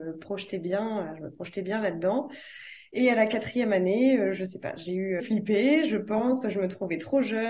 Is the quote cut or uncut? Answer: cut